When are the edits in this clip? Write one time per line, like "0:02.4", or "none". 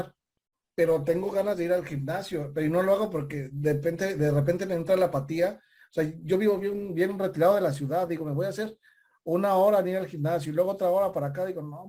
none